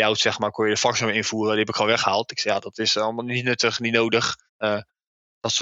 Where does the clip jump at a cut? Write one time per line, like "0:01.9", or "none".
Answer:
0:04.5